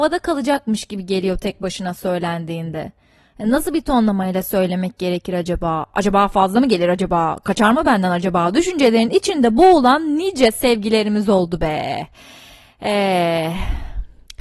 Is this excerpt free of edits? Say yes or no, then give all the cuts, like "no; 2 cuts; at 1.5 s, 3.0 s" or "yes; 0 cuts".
yes; 0 cuts